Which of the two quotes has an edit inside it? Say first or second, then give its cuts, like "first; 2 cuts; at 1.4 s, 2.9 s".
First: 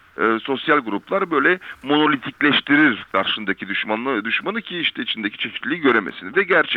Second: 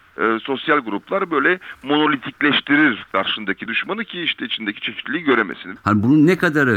second; 2 cuts; at 3.7 s, 5.8 s